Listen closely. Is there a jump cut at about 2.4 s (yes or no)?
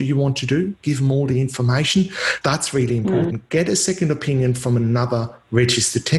yes